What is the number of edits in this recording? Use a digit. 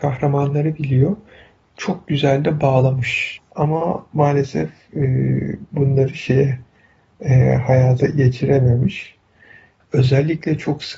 2